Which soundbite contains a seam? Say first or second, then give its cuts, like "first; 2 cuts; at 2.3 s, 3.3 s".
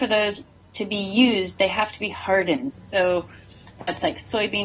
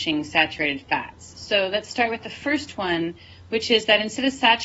first; 1 cut; at 2.7 s